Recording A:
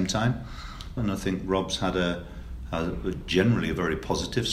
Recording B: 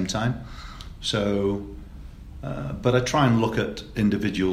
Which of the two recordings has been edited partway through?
A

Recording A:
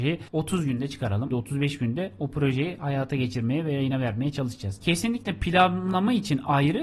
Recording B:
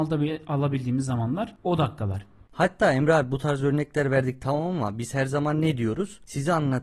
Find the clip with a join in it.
A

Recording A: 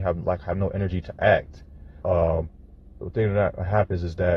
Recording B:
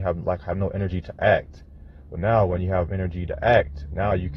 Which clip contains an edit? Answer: A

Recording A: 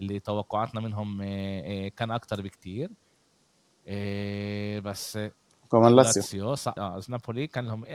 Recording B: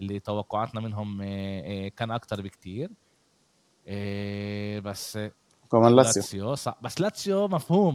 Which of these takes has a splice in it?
A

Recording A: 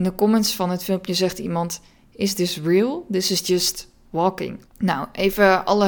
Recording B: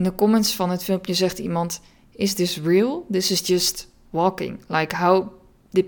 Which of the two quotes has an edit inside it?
A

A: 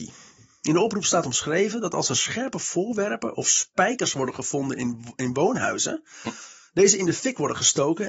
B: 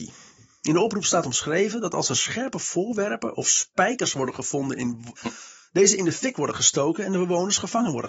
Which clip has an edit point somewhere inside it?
B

